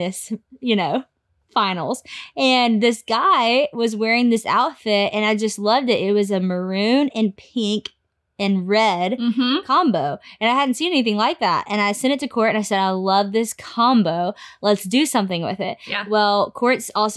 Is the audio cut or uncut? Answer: uncut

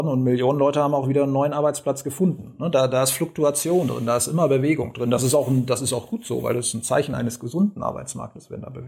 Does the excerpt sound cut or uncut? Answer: uncut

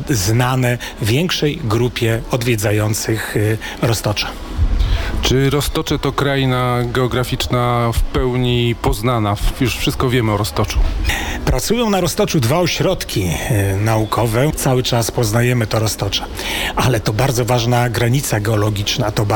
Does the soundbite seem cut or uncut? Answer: cut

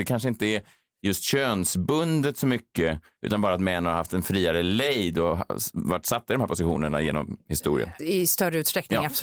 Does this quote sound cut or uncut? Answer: cut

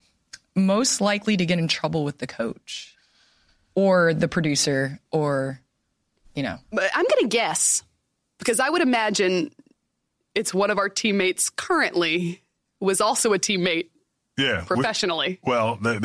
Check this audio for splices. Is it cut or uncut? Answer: uncut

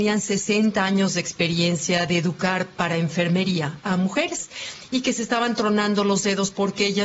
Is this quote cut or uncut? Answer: uncut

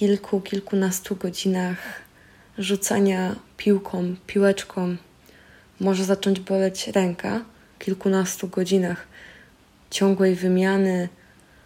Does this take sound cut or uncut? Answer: cut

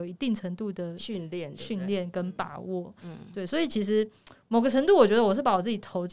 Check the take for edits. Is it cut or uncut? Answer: uncut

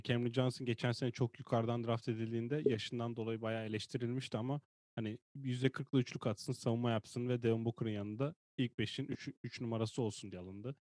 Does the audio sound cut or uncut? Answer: uncut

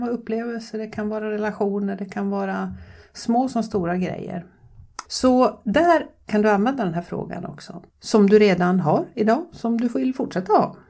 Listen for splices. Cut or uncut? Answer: cut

